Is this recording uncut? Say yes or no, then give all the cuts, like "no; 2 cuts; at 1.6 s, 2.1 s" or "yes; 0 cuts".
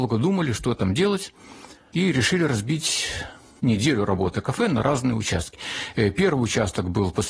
yes; 0 cuts